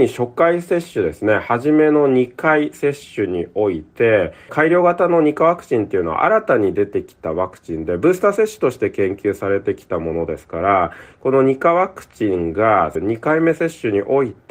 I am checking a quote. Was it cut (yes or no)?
yes